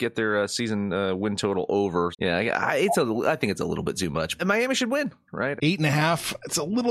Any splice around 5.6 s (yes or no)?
yes